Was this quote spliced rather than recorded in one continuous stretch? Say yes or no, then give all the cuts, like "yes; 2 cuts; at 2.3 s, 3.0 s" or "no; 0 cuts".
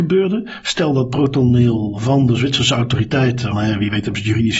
yes; 1 cut; at 3.5 s